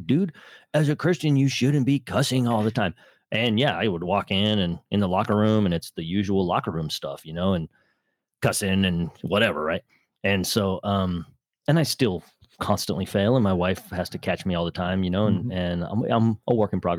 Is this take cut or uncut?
uncut